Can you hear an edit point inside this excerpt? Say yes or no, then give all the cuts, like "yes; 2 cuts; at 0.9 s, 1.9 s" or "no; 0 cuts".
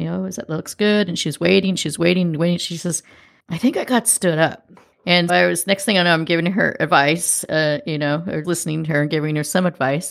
yes; 2 cuts; at 5.3 s, 8.4 s